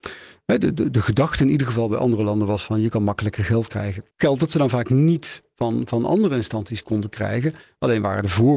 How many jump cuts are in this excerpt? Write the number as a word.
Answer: one